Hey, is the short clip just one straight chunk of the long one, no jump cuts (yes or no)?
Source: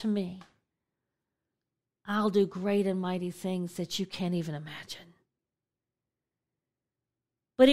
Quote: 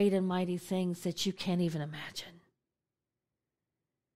yes